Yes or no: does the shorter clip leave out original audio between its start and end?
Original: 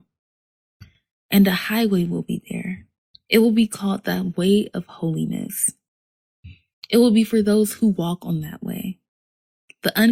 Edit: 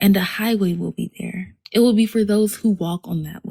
yes